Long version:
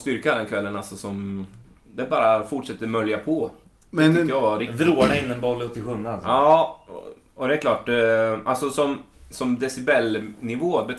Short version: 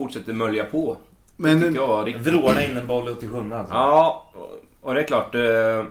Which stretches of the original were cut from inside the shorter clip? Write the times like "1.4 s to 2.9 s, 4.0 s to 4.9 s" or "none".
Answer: none